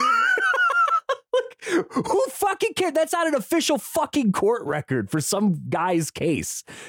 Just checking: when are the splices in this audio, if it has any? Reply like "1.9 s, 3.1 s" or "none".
none